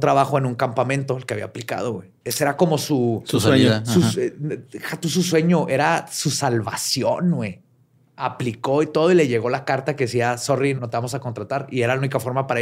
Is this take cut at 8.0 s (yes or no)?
no